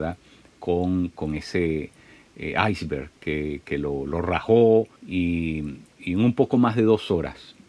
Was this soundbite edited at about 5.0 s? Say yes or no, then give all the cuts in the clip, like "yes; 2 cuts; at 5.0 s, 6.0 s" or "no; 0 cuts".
yes; 1 cut; at 5.0 s